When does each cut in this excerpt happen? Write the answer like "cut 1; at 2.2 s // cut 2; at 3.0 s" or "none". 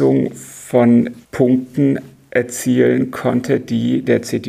cut 1; at 1.2 s

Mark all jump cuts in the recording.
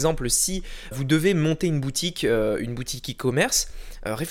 cut 1; at 0.9 s

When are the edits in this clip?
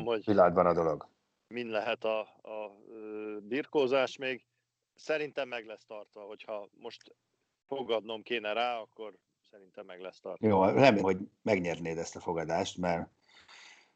cut 1; at 11.0 s

